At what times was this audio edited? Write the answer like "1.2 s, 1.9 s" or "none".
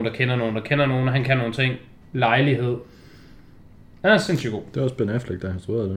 2.1 s